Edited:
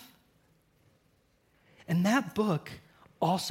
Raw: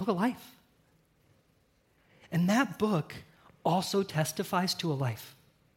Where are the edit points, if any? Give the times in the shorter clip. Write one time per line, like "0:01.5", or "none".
none

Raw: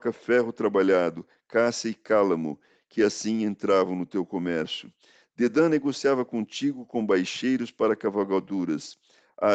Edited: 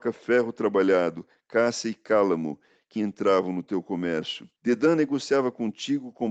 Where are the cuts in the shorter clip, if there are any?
0:03.0
0:04.6

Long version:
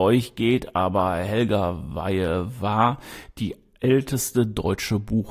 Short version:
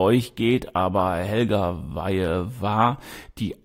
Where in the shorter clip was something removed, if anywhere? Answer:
none

